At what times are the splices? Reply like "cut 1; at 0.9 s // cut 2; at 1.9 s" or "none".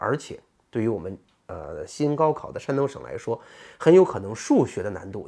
none